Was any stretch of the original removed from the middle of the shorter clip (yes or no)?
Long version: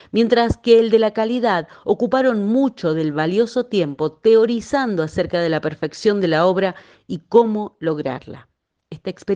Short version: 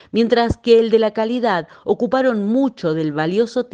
no